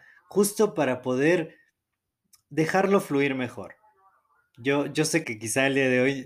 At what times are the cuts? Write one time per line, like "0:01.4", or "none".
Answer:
0:05.2